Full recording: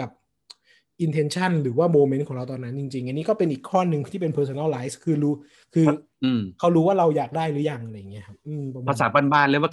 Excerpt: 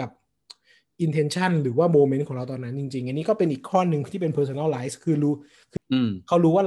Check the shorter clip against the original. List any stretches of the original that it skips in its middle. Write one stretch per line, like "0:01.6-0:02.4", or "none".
0:05.8-0:06.1